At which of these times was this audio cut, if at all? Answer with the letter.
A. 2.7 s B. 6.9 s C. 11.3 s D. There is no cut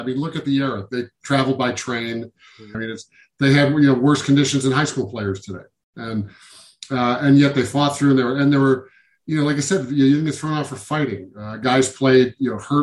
A